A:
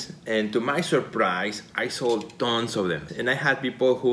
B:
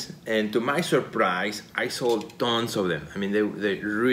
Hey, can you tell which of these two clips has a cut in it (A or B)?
A